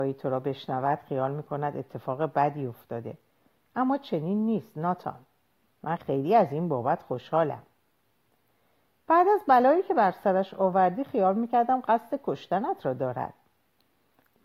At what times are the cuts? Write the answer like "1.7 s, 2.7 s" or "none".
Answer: 6.0 s